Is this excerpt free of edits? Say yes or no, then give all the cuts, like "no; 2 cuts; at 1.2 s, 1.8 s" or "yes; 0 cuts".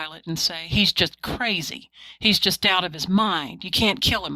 yes; 0 cuts